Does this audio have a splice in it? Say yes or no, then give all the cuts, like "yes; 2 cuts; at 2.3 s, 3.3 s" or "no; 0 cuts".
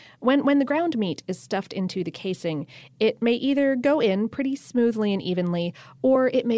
no; 0 cuts